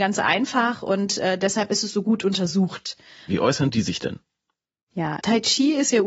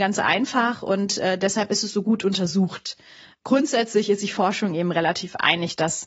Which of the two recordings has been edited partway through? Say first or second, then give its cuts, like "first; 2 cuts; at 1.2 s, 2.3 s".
first; 2 cuts; at 3.3 s, 5.2 s